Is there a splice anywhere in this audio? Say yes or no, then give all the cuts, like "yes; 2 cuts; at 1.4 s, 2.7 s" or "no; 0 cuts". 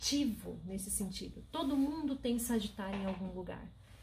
no; 0 cuts